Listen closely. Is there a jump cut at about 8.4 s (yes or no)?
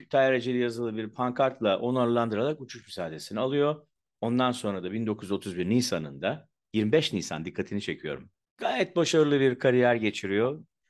yes